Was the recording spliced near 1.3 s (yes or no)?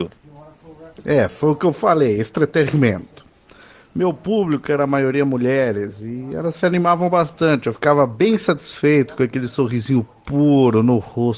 no